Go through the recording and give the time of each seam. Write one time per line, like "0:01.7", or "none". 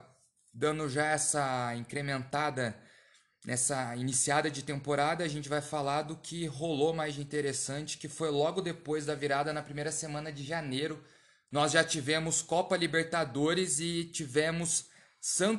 none